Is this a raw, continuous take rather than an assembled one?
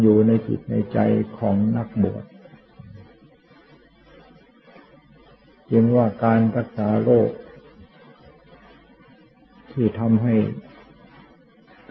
yes; 0 cuts

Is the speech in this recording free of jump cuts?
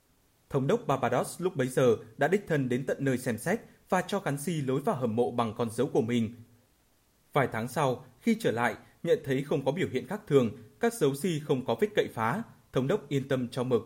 yes; 0 cuts

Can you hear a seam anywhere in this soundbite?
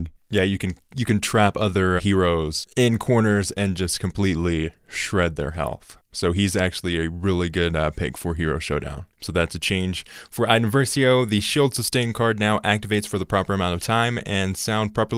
yes; 2 cuts; at 2.0 s, 9.1 s

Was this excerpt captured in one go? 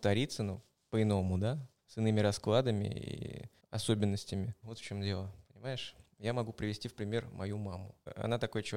no; 2 cuts; at 1.8 s, 4.6 s

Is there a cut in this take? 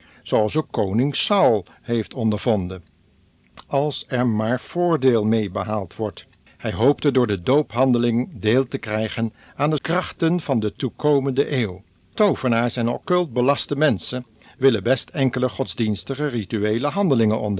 yes; 3 cuts; at 6.5 s, 9.8 s, 12.1 s

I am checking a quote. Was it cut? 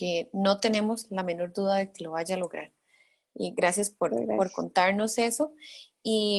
no; 0 cuts

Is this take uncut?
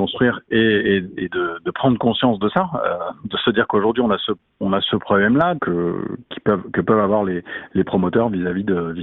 no; 1 cut; at 5.6 s

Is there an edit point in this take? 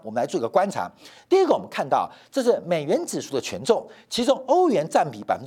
no; 0 cuts

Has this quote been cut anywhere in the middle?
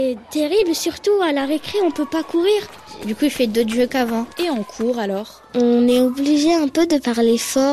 yes; 1 cut; at 3.0 s

